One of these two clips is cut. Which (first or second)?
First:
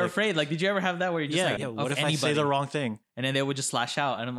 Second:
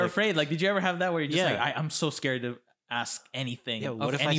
first